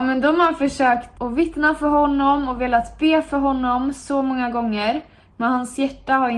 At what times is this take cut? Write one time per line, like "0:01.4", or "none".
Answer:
0:01.1